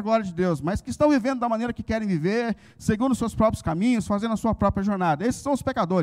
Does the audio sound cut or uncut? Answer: uncut